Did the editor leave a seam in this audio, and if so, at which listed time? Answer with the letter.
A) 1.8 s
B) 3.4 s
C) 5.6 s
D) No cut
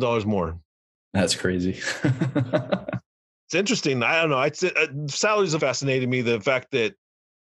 C